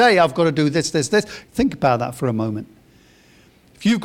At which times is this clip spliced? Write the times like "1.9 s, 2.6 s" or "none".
1.4 s